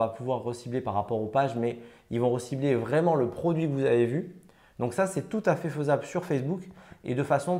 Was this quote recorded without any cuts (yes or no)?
yes